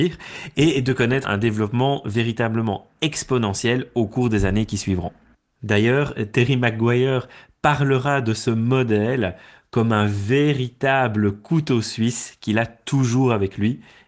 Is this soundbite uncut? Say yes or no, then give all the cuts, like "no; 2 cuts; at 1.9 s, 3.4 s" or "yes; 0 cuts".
no; 1 cut; at 1.2 s